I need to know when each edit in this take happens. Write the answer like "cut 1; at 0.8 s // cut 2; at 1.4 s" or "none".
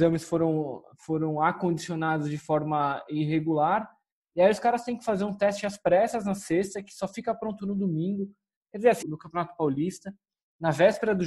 cut 1; at 9.0 s